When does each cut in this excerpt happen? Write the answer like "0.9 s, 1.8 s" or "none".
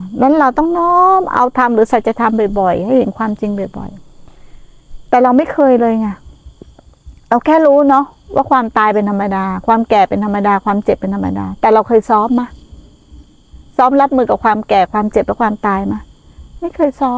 none